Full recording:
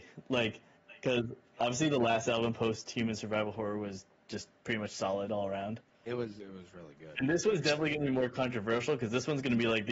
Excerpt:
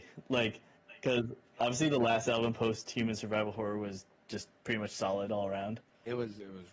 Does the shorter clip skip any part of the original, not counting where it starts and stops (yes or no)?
no